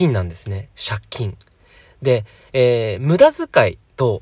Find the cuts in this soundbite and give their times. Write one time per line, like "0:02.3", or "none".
none